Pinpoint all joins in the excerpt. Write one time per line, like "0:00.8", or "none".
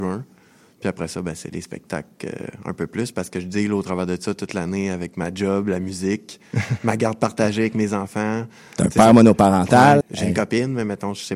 0:10.0